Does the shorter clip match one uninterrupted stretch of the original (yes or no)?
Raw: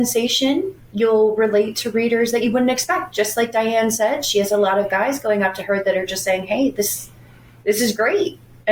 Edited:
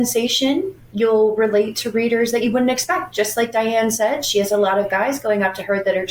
yes